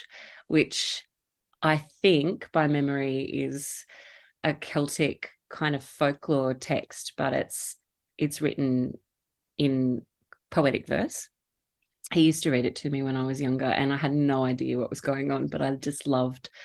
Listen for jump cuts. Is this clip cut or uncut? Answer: uncut